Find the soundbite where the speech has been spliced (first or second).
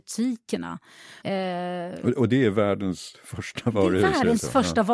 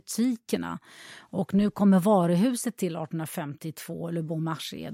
first